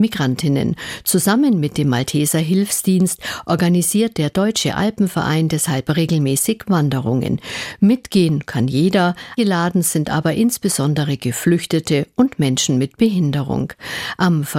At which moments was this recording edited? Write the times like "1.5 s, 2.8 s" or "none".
9.4 s